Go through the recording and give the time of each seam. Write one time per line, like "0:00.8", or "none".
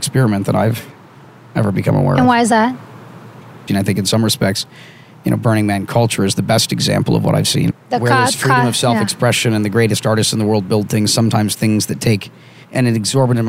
0:03.7
0:07.7